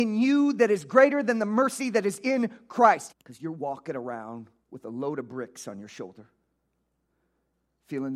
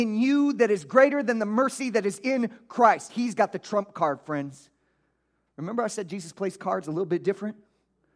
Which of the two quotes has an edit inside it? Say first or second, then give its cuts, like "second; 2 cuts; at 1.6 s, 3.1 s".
first; 2 cuts; at 3.1 s, 4.6 s